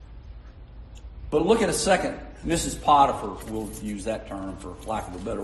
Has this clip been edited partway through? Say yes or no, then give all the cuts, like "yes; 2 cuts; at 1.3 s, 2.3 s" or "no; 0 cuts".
yes; 1 cut; at 2.4 s